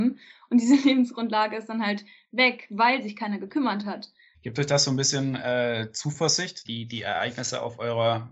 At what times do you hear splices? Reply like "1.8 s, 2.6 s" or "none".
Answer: 4.3 s, 6.6 s